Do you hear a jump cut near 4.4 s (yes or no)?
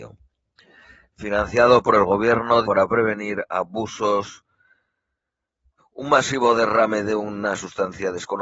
no